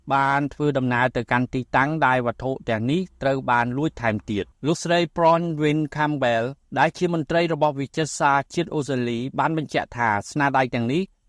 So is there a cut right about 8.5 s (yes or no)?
no